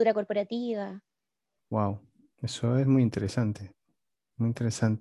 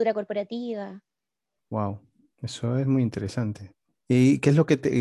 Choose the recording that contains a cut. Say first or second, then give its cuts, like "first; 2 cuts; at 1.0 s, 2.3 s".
second; 1 cut; at 3.9 s